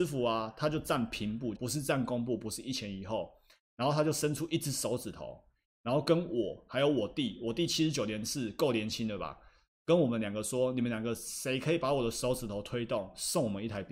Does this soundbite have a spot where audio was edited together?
yes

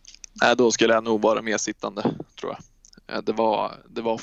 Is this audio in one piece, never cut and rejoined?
yes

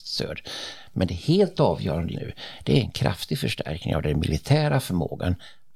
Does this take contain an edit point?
yes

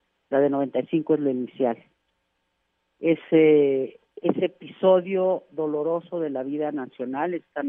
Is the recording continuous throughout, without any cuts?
no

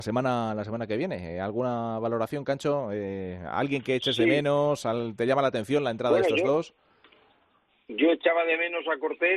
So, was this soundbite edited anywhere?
no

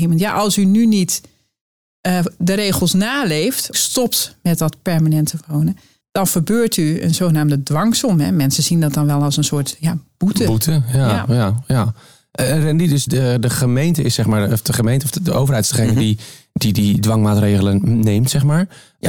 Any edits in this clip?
yes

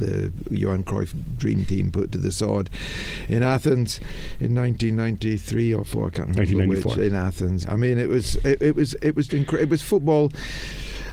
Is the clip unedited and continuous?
no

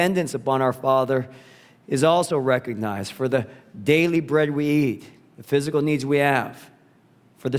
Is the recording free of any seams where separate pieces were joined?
yes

